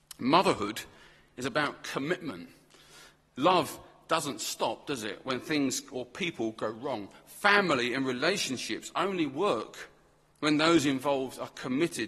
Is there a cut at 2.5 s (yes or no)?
no